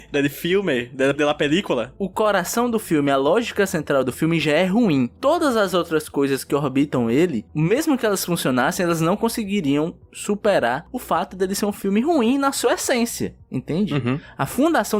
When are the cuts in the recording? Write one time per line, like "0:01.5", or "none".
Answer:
0:01.1

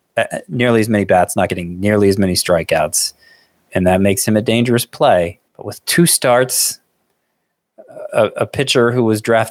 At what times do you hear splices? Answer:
0:05.5
0:08.1

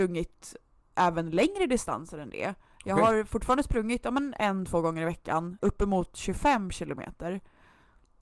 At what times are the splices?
0:05.6

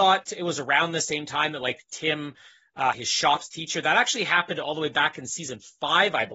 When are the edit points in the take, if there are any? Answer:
0:02.9

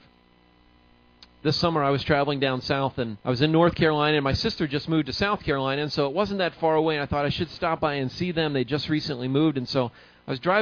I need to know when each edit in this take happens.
0:03.2

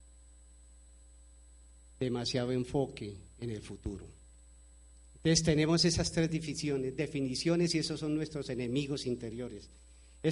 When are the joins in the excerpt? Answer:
none

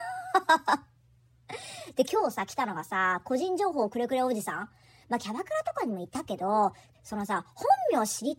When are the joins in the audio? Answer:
0:05.0
0:06.9

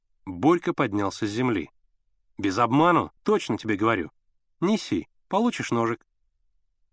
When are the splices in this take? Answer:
0:03.2

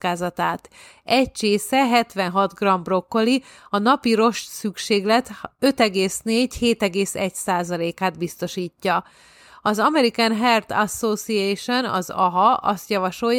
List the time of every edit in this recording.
none

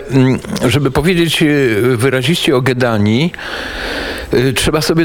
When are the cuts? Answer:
none

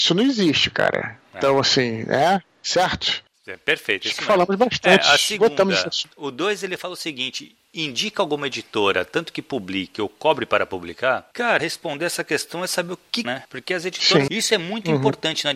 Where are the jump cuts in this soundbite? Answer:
0:11.6
0:13.2
0:14.3

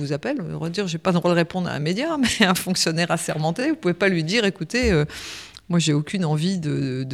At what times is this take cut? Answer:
none

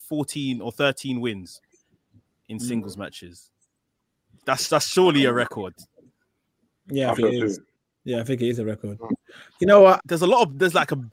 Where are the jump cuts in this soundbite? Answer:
0:07.2
0:10.0

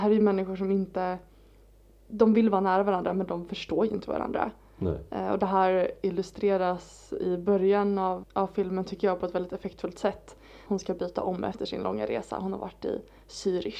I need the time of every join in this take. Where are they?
0:08.2
0:10.7

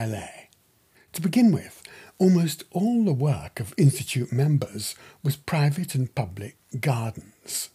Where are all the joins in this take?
0:00.9

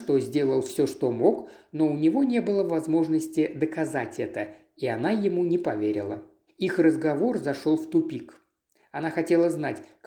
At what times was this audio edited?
0:06.5

